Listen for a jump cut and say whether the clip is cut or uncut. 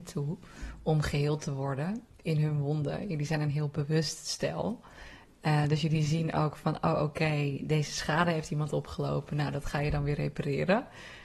uncut